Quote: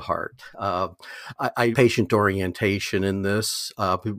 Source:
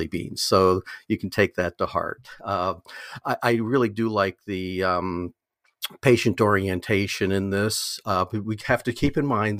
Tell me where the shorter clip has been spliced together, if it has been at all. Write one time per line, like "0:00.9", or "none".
0:01.7